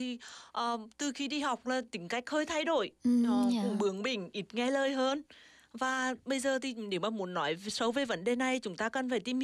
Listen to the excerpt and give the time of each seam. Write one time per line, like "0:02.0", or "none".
none